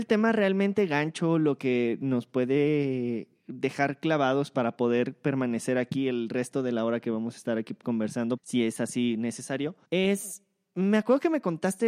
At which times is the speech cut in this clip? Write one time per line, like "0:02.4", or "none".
0:08.4
0:09.8